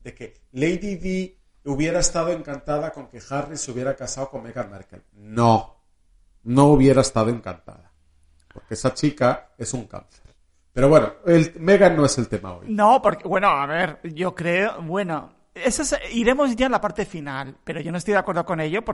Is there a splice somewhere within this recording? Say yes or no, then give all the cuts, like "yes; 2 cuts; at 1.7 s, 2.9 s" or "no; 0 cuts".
no; 0 cuts